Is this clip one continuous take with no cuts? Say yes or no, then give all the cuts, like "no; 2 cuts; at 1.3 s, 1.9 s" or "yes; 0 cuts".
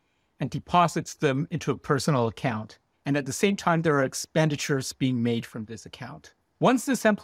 no; 1 cut; at 2.9 s